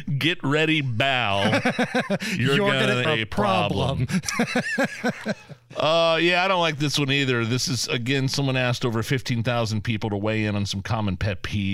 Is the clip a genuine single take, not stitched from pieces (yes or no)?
no